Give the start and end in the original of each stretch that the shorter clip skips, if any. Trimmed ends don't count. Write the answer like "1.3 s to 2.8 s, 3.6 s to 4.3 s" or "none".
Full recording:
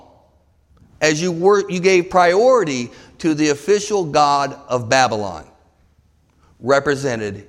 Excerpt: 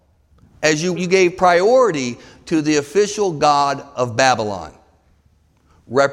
1.3 s to 1.7 s